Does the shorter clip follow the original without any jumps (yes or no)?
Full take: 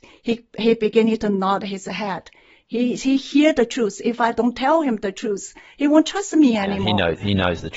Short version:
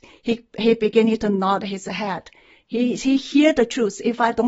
yes